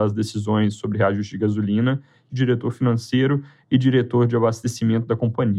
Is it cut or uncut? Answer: cut